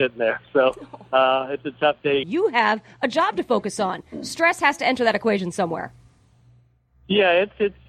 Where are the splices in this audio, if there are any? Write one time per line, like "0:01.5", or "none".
0:02.2

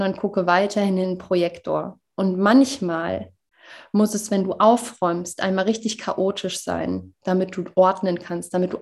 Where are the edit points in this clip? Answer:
none

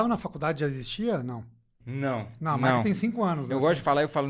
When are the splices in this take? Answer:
0:01.8

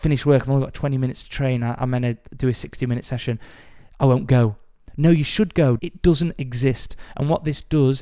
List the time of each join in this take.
0:05.8

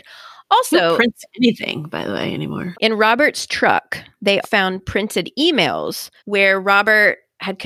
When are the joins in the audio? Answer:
0:02.7
0:04.4
0:06.2

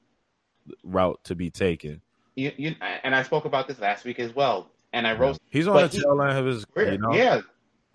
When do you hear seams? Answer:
0:05.3
0:06.7

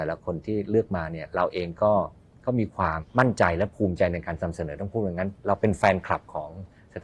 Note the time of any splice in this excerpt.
0:03.0

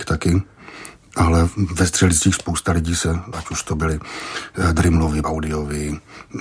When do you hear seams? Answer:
0:03.3
0:05.2

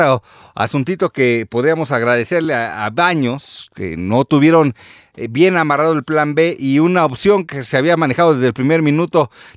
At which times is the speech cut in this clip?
none

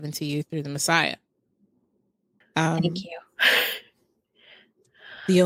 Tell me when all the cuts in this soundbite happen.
0:02.4

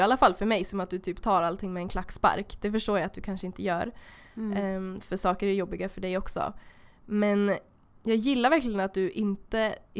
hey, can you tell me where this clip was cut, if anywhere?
none

